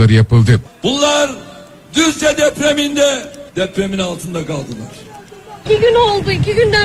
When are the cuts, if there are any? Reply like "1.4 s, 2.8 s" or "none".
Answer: 3.5 s, 5.7 s